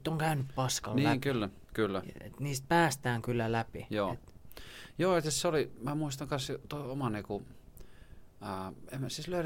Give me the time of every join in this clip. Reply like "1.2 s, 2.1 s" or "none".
none